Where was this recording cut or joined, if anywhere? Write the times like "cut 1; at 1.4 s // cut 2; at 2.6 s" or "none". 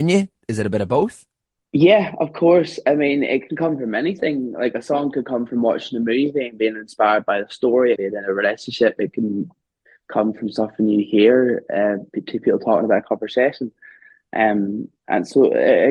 cut 1; at 8.0 s